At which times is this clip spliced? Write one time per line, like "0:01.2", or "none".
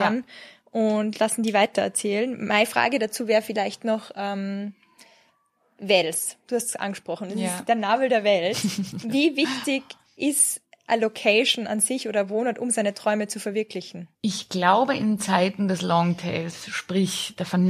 0:14.2